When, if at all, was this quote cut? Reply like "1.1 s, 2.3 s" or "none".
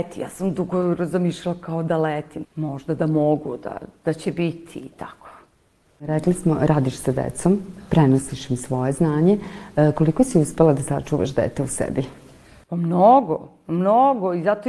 2.4 s